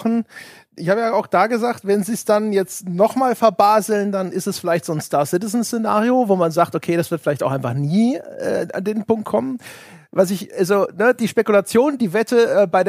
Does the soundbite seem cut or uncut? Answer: uncut